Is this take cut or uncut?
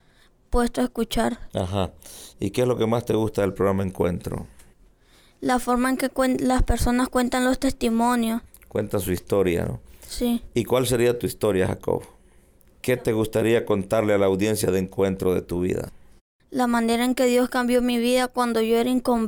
uncut